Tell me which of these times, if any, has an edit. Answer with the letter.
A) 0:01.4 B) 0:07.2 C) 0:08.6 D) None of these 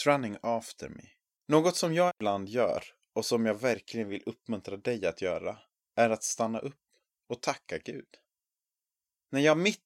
A